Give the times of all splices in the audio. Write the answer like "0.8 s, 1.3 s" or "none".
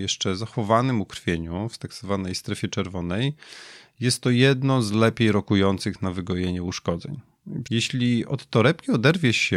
7.6 s